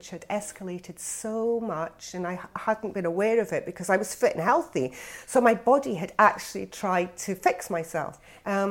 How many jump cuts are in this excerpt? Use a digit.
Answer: 0